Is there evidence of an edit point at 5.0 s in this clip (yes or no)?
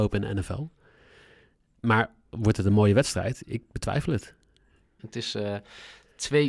yes